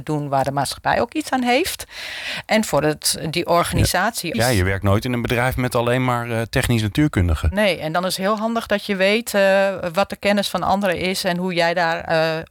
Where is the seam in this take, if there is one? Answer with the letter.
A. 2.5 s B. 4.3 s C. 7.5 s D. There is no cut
B